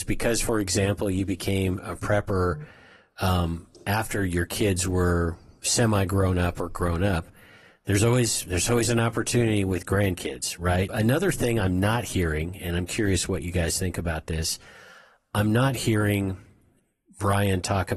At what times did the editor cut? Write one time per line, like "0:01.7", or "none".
0:10.9